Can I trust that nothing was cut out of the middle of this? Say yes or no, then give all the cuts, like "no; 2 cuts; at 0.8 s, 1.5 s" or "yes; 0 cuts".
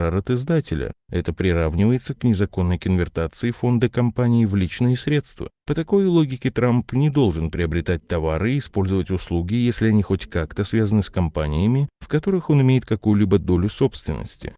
yes; 0 cuts